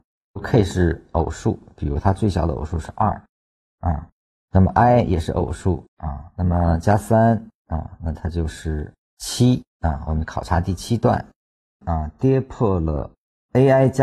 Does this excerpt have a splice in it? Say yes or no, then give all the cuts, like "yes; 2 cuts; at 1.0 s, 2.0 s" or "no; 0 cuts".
yes; 2 cuts; at 5.9 s, 11.8 s